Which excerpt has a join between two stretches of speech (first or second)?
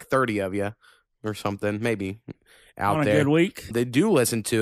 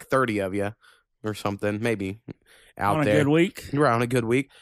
first